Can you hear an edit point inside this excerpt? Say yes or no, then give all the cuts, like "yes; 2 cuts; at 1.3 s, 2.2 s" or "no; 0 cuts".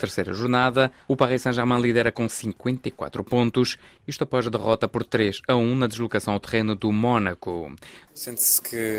yes; 1 cut; at 8.1 s